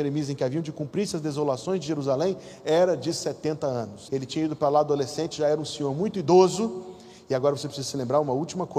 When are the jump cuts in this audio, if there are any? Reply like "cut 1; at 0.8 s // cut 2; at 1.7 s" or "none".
cut 1; at 4.1 s